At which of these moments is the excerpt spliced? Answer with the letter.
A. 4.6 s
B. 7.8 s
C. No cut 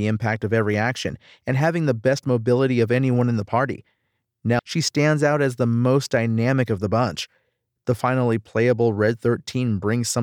A